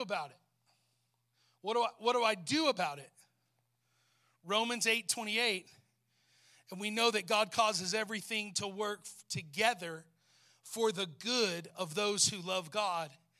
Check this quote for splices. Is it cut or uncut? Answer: uncut